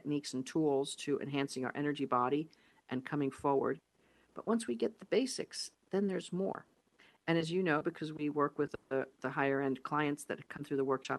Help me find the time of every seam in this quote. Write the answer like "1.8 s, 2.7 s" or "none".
none